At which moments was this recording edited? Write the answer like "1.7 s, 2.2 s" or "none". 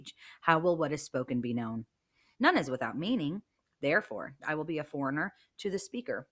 2.3 s, 4.4 s